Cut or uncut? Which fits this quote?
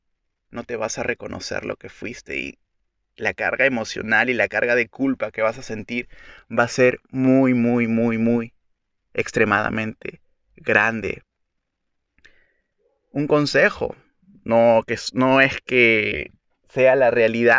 uncut